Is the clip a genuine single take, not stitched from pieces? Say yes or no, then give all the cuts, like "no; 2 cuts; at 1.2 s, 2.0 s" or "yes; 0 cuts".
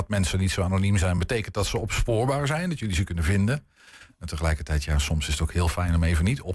yes; 0 cuts